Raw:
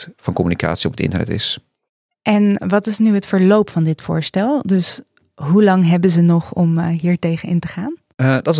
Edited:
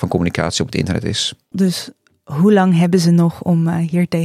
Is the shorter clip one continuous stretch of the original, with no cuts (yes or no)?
no